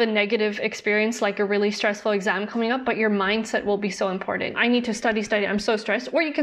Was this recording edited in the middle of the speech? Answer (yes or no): yes